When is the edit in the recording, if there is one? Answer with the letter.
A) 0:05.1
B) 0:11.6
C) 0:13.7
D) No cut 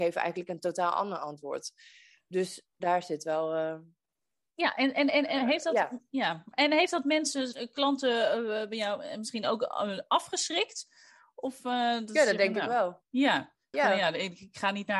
C